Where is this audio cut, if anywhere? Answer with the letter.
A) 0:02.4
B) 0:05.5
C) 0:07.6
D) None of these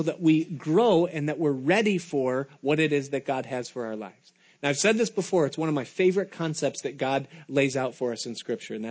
D